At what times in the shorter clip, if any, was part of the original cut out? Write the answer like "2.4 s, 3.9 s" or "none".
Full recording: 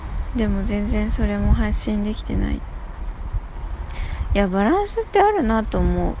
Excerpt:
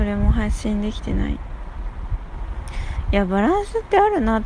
none